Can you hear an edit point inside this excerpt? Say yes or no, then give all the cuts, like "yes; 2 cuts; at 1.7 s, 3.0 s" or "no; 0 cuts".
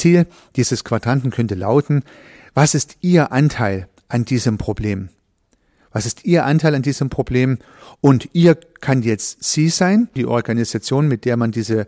yes; 1 cut; at 10.2 s